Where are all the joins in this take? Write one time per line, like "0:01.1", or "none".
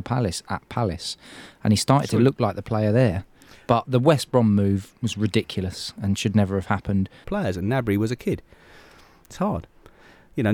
0:07.2